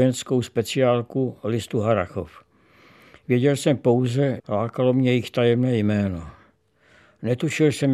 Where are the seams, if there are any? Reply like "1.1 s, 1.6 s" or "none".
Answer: 4.4 s